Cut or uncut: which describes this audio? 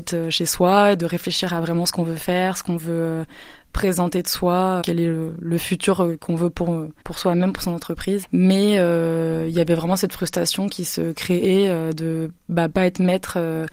cut